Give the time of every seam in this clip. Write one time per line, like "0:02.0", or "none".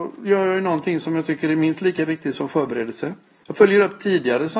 0:03.4

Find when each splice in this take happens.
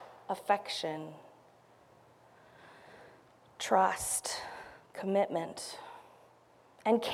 none

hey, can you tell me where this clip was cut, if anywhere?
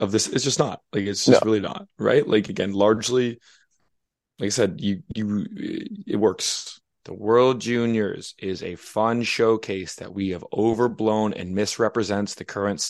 0:07.0

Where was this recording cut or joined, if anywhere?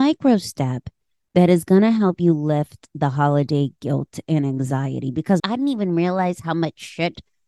0:05.4

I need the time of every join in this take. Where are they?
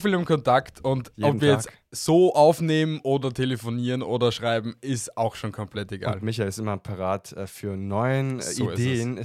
none

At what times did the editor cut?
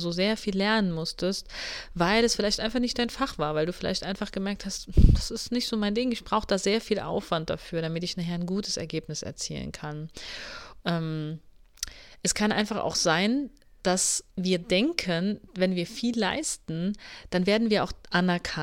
0:10.8
0:14.3

